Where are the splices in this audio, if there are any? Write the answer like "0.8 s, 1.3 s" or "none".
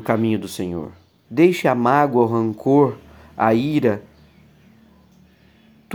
1.2 s